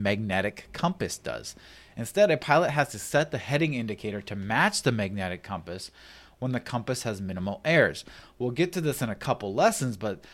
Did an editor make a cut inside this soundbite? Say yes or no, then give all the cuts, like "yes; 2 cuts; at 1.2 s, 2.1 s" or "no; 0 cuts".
no; 0 cuts